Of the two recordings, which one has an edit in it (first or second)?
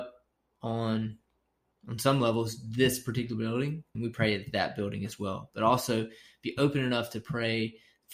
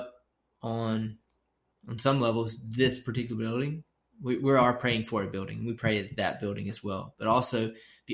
first